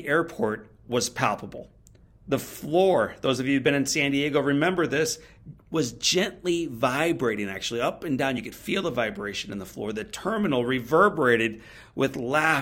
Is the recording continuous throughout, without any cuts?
yes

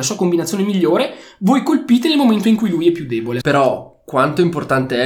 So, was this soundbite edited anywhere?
yes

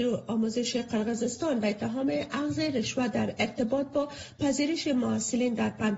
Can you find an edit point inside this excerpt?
no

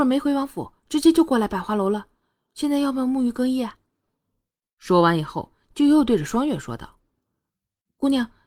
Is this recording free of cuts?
yes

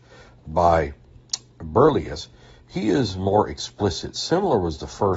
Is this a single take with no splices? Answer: yes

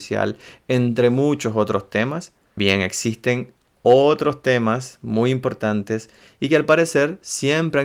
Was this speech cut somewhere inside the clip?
yes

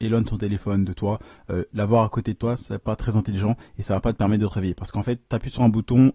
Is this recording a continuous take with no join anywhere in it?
yes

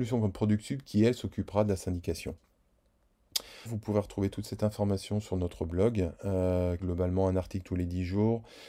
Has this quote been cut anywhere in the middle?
yes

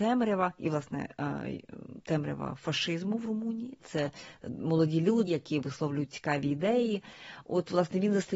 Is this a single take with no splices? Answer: no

